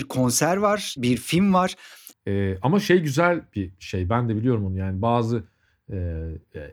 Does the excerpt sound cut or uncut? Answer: cut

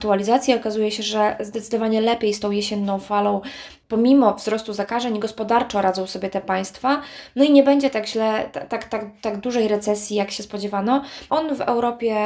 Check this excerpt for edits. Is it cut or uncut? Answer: cut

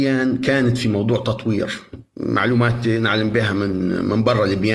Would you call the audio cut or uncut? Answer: uncut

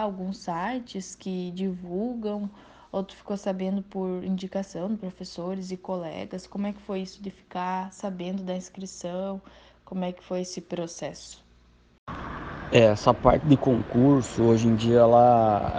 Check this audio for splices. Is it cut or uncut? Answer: uncut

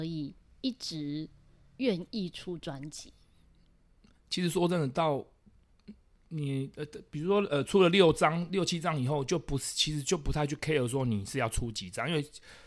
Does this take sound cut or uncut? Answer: uncut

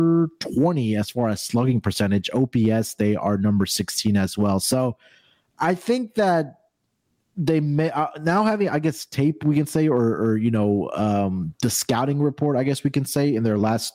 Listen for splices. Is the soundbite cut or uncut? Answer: uncut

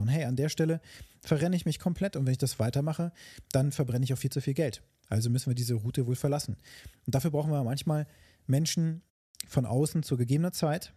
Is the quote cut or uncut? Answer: uncut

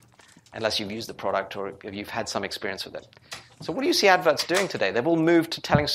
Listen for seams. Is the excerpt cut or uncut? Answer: uncut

